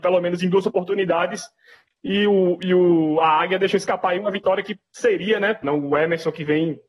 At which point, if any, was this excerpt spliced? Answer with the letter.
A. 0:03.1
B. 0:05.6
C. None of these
B